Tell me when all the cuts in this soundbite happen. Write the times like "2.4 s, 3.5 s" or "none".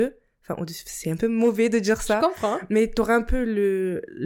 none